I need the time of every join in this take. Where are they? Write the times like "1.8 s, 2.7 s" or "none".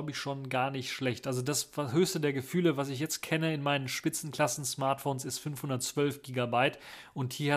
none